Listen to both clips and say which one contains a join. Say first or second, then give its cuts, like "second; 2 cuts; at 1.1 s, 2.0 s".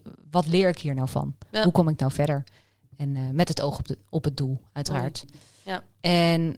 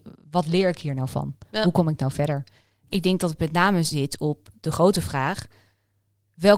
second; 1 cut; at 2.9 s